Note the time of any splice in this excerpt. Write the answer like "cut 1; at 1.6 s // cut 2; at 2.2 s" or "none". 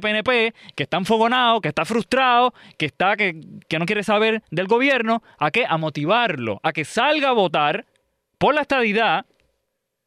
none